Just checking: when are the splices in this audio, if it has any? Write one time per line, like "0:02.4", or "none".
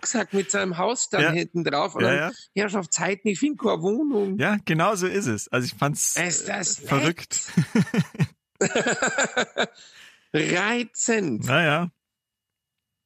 none